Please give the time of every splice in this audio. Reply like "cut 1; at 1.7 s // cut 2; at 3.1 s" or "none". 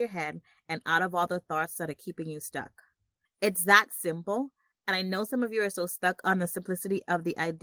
cut 1; at 3.3 s

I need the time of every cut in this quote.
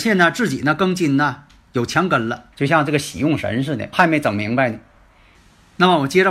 cut 1; at 2.5 s // cut 2; at 3.9 s

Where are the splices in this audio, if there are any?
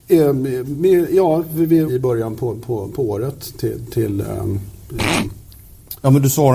cut 1; at 1.9 s

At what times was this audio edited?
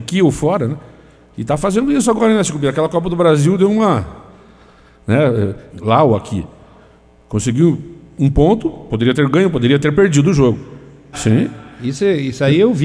cut 1; at 5.7 s // cut 2; at 11.1 s

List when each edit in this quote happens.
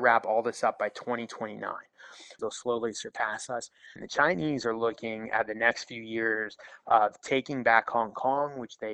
cut 1; at 2.4 s // cut 2; at 4.0 s

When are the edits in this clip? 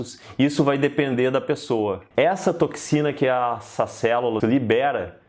cut 1; at 2.1 s // cut 2; at 4.4 s

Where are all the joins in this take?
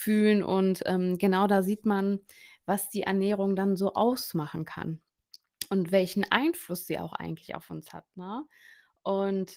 none

